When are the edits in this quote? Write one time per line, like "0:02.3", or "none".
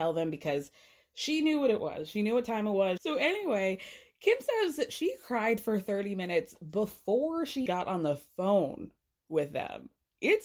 0:03.0
0:07.7